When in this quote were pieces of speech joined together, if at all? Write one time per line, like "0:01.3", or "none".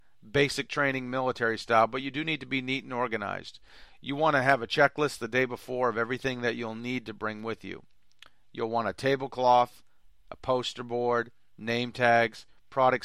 none